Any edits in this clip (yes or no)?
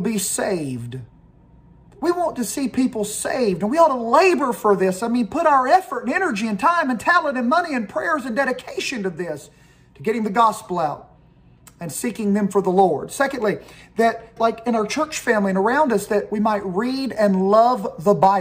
yes